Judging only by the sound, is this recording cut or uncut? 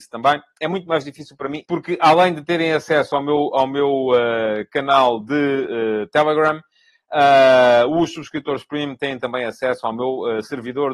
cut